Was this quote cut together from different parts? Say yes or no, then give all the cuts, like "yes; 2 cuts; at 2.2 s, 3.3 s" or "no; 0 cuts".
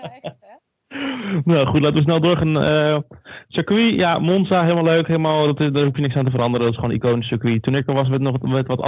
no; 0 cuts